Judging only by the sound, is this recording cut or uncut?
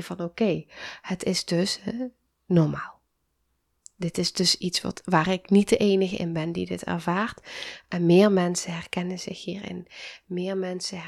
uncut